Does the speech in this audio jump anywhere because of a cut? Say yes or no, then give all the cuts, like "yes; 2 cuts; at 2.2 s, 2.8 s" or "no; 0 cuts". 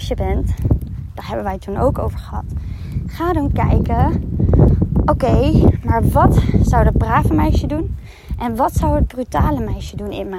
no; 0 cuts